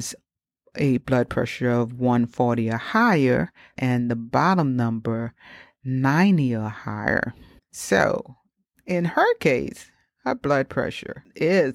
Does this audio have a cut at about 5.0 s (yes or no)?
no